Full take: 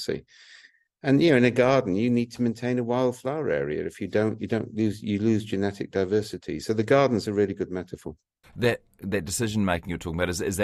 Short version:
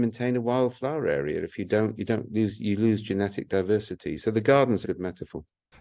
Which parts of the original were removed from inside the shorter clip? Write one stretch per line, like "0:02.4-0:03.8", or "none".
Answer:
0:07.3-0:07.6